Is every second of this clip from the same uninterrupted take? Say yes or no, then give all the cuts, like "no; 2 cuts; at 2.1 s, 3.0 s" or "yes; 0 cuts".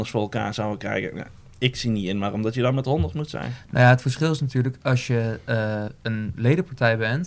yes; 0 cuts